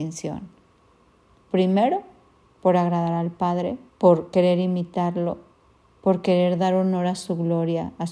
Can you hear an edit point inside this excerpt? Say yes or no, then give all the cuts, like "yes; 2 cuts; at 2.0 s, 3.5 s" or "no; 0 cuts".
yes; 2 cuts; at 1.4 s, 3.9 s